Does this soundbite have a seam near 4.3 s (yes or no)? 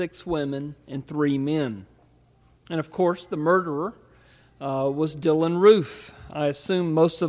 no